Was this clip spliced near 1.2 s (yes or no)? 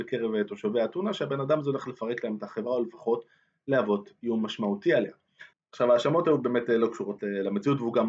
no